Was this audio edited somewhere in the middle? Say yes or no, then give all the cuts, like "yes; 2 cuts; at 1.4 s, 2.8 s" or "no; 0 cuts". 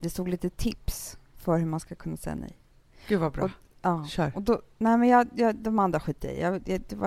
no; 0 cuts